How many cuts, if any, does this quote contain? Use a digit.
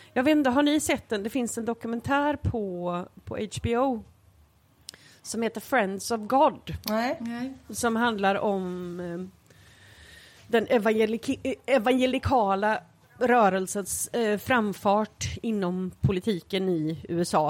0